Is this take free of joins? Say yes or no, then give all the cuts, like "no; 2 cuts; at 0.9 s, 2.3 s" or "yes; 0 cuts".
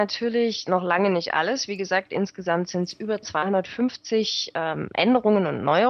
yes; 0 cuts